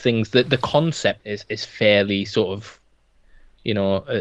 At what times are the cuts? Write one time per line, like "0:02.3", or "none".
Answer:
0:01.2